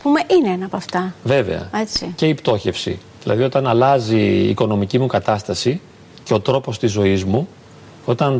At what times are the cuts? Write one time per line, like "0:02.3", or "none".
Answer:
none